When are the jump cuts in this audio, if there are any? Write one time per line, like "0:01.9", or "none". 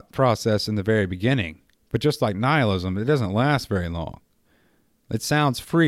none